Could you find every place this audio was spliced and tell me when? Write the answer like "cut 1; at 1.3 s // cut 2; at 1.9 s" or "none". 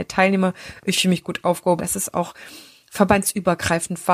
cut 1; at 1.8 s